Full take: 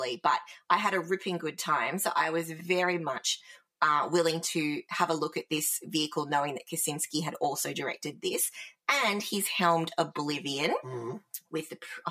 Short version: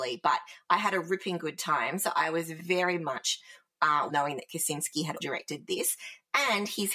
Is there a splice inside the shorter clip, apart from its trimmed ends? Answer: yes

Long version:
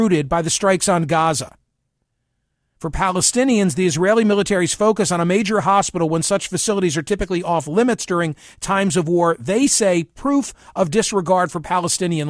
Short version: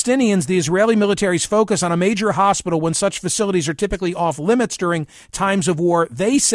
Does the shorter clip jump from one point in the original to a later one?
no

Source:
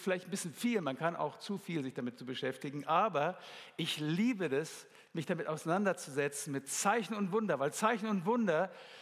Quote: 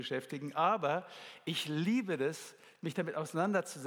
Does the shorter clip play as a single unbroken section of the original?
yes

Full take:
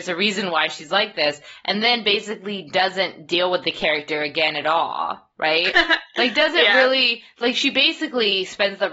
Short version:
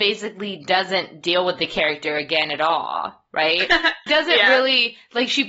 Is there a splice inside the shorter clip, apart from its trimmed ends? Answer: yes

